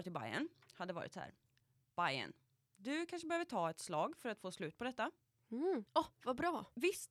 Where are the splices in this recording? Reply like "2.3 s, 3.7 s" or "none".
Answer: 5.9 s